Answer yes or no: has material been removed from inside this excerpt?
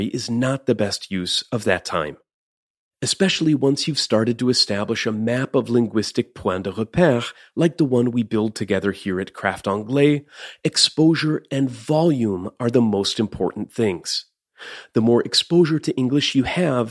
no